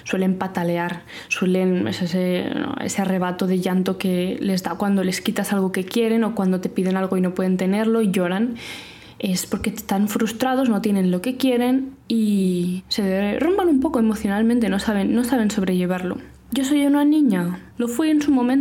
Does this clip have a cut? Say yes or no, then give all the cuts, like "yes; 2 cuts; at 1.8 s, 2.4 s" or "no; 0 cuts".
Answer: yes; 1 cut; at 17.7 s